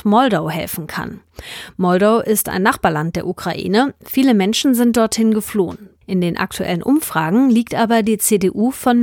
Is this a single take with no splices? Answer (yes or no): no